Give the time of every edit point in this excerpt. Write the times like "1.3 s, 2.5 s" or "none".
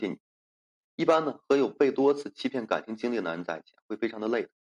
none

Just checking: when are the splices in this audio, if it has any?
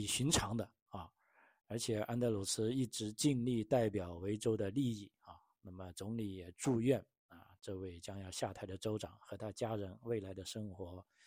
none

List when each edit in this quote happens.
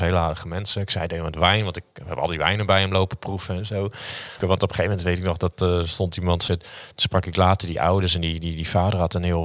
4.4 s, 6.5 s

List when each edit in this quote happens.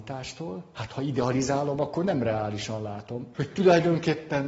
3.3 s

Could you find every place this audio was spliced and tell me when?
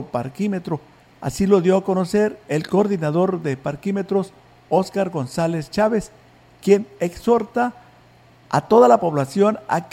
1.1 s

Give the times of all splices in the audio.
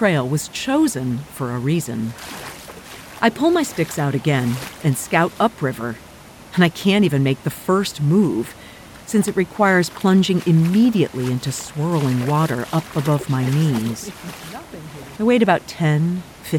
3.2 s, 15.2 s

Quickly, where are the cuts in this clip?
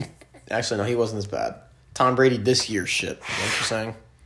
none

